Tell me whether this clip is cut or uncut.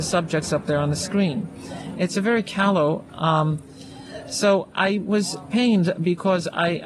cut